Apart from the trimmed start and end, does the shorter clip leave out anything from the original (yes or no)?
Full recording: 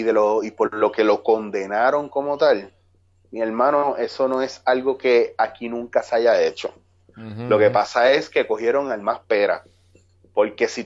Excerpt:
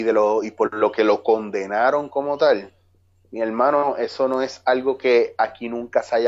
no